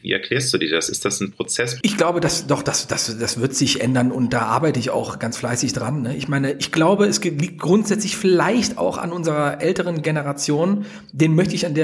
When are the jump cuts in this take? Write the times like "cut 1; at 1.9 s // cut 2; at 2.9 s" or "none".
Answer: cut 1; at 1.8 s